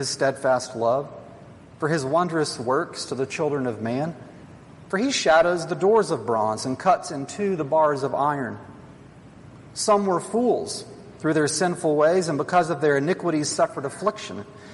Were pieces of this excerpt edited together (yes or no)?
no